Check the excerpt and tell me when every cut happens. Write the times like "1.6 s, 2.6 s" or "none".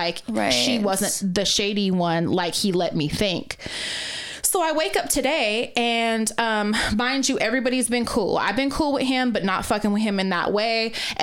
none

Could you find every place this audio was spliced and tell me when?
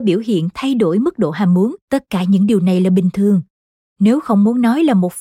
1.8 s

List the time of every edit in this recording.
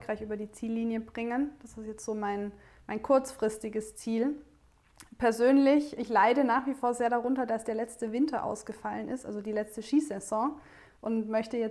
6.0 s

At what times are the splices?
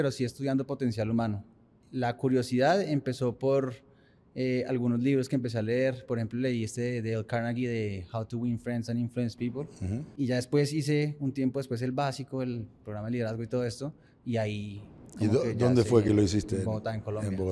none

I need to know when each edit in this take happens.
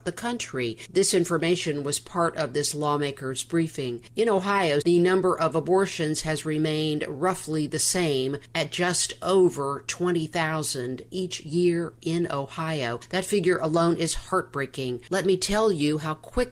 4.8 s, 15.1 s

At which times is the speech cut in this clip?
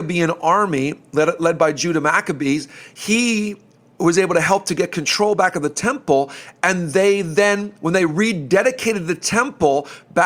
none

